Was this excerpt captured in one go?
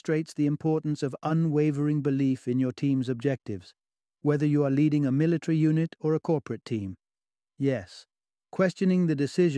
no; 1 cut; at 7.5 s

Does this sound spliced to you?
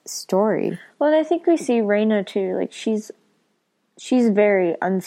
no; 0 cuts

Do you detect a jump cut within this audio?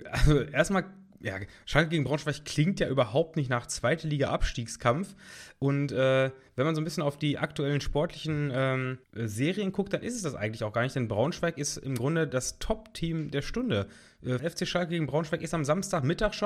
yes; 2 cuts; at 9.0 s, 14.4 s

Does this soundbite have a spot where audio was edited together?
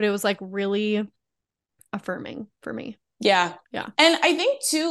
yes; 1 cut; at 3.6 s

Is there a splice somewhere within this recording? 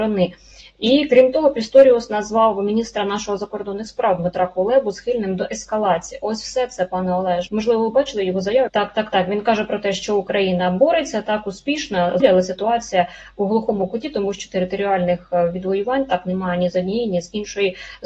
yes; 3 cuts; at 7.5 s, 8.7 s, 12.2 s

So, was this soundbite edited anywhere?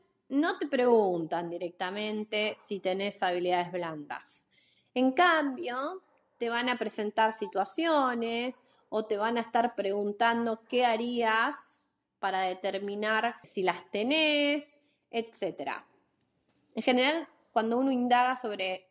yes; 1 cut; at 13.4 s

